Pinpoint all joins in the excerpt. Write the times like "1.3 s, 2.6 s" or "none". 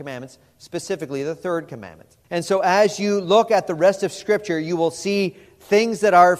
2.2 s